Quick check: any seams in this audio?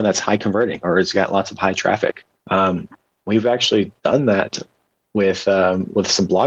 yes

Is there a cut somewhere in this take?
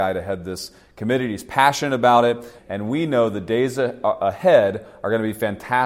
yes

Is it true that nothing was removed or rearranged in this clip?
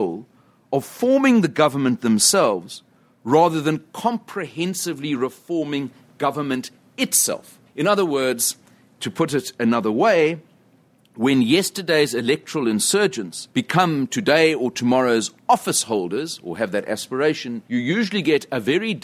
no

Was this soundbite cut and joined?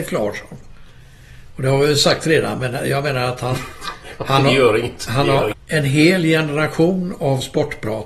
yes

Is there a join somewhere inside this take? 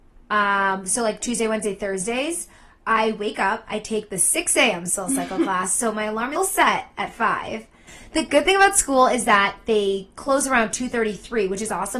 yes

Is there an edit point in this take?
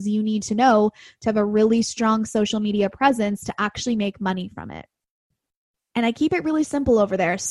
no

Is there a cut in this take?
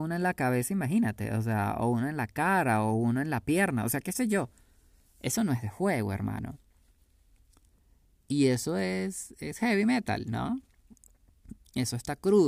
no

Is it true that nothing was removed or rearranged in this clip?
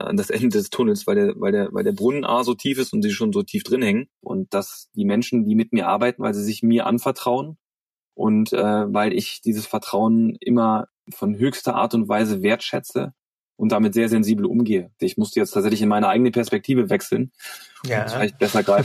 no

